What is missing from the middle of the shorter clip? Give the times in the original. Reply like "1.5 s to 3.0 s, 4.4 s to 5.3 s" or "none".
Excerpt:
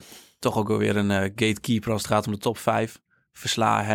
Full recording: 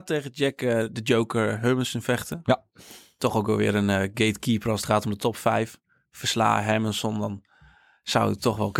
none